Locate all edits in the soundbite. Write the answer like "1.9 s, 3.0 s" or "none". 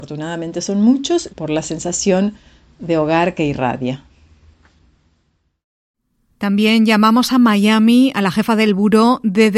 1.3 s